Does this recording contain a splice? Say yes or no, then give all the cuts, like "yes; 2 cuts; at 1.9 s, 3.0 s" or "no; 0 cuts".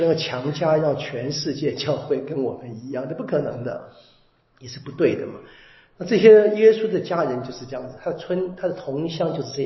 no; 0 cuts